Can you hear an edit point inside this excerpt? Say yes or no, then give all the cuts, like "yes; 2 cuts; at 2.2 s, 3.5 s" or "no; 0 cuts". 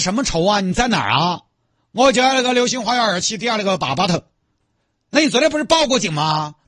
no; 0 cuts